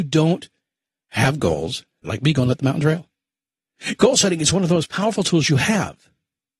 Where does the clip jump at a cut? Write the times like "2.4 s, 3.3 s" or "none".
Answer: 2.0 s